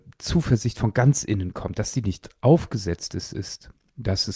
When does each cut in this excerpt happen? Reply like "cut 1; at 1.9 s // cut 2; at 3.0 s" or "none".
none